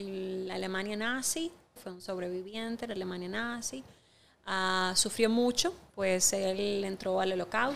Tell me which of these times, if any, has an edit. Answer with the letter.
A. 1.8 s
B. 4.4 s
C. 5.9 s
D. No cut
A